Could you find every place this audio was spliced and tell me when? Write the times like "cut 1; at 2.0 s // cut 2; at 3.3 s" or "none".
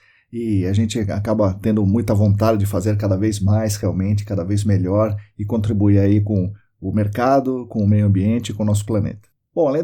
none